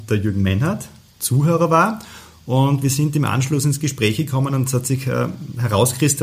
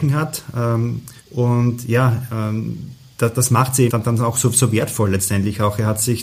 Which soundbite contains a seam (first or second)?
second